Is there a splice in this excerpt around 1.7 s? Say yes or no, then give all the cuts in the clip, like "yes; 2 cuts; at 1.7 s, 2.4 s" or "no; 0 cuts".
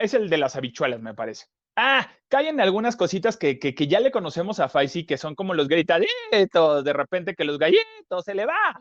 yes; 1 cut; at 1.7 s